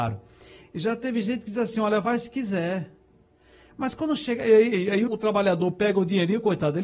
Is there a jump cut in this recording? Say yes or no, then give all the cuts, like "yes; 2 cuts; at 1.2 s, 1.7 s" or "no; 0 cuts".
yes; 1 cut; at 5.1 s